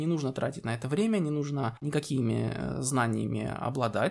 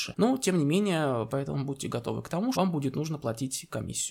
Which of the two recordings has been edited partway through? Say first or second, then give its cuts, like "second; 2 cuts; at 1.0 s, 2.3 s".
second; 2 cuts; at 1.3 s, 2.5 s